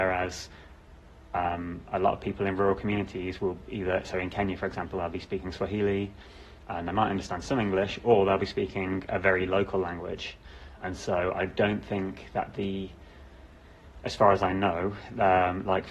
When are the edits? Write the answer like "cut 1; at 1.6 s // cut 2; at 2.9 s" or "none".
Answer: none